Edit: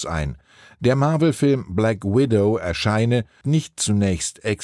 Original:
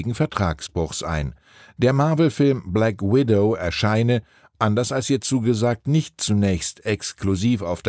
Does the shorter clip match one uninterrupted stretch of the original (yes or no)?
no